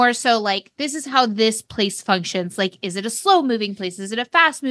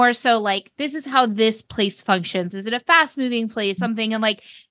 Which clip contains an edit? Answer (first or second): second